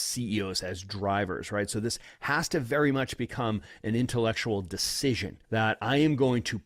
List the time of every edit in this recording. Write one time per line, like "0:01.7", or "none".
0:05.4